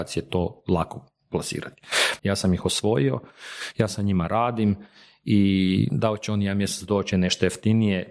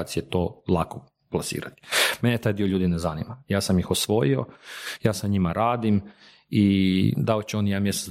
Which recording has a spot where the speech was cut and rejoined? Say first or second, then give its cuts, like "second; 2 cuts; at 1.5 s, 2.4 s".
first; 2 cuts; at 2.2 s, 7.1 s